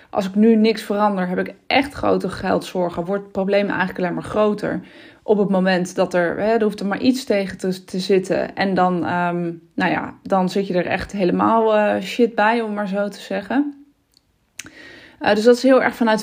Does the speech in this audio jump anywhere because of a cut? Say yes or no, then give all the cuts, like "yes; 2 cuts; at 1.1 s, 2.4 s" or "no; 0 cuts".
no; 0 cuts